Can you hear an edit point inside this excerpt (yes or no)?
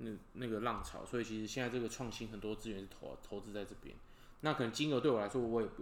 yes